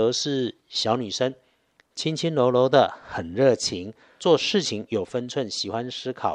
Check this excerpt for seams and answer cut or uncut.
uncut